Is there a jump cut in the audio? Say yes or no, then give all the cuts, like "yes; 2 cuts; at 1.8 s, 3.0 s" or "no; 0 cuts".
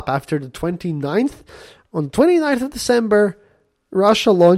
no; 0 cuts